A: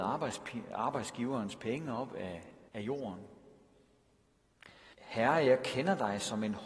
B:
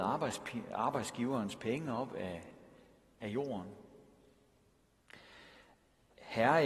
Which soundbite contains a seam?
A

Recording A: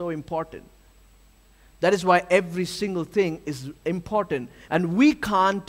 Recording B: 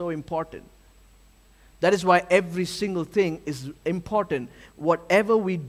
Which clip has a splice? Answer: A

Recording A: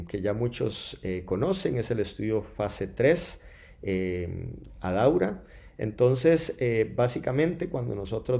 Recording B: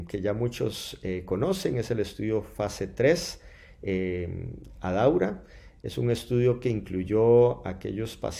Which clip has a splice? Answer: A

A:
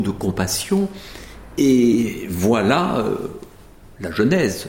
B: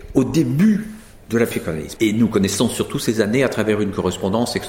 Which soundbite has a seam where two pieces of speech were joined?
B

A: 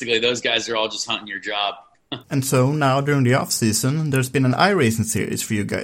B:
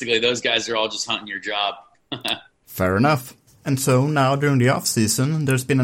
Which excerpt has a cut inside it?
A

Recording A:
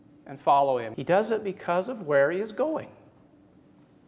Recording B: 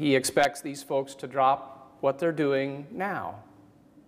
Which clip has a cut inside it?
A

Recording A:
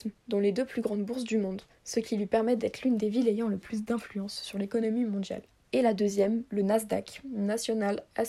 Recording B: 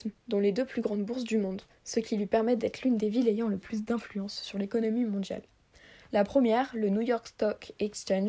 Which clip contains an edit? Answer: A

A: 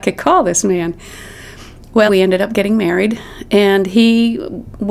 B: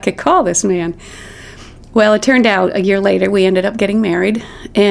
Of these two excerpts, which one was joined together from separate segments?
A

